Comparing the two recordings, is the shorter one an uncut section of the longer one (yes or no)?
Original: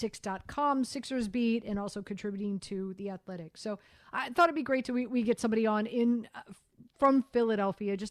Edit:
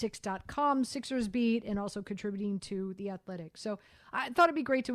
yes